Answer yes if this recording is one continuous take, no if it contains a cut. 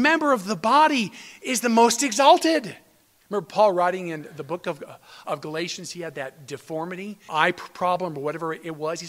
no